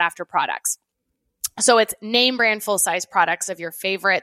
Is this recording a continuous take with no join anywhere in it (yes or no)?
yes